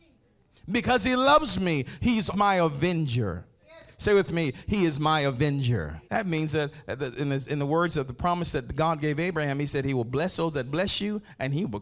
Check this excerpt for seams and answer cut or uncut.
cut